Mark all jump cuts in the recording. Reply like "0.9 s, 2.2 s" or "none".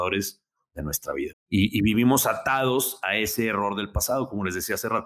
1.3 s